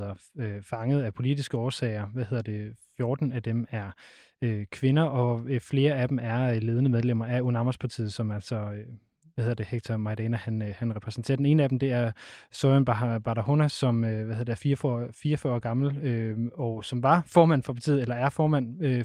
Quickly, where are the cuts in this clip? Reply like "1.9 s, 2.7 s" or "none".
none